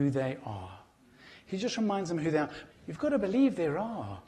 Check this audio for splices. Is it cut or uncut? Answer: cut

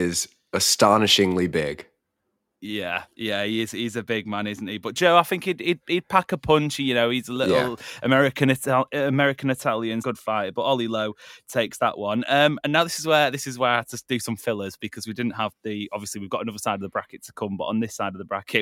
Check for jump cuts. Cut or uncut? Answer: cut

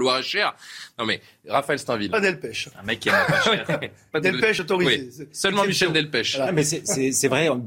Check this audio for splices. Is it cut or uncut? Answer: uncut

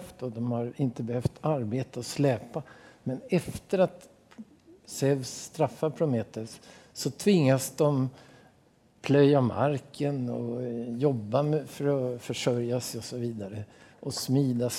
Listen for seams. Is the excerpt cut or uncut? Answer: uncut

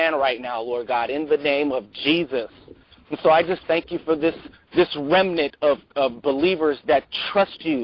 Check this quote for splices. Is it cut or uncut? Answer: uncut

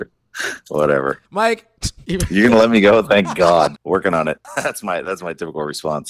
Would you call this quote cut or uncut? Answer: cut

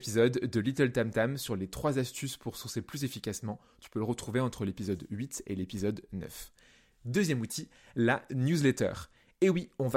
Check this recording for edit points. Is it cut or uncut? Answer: uncut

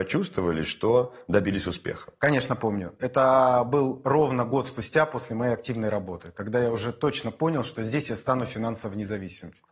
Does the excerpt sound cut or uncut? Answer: uncut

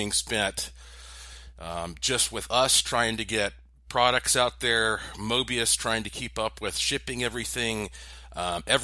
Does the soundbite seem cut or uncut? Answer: uncut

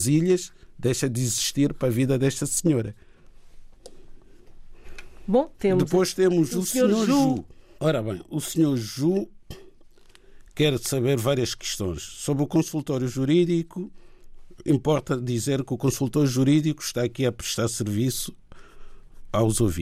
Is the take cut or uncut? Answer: cut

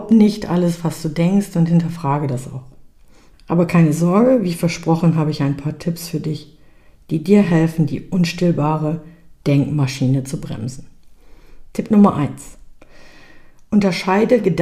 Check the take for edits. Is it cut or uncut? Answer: cut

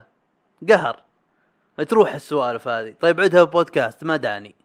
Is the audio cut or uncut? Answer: uncut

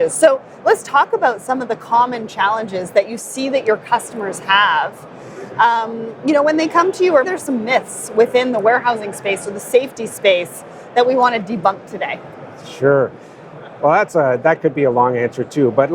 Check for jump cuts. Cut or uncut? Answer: cut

